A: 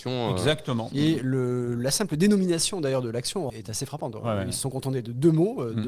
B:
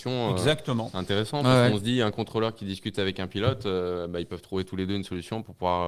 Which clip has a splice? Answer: A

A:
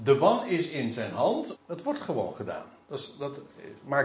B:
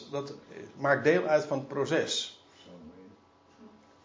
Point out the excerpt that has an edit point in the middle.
A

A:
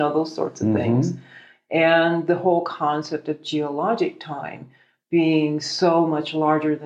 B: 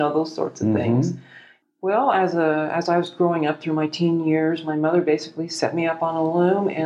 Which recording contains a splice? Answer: B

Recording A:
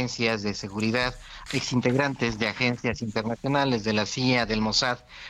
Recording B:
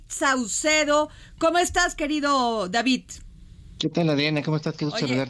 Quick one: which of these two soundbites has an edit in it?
A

